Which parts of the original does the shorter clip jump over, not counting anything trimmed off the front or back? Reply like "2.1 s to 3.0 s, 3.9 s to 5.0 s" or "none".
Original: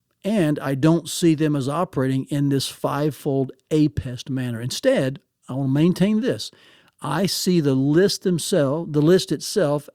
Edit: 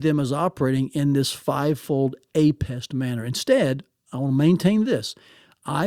none